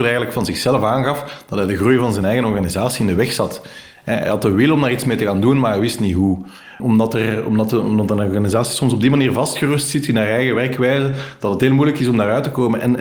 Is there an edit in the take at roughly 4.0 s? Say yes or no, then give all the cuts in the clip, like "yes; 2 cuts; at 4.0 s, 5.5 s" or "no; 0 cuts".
no; 1 cut; at 6.8 s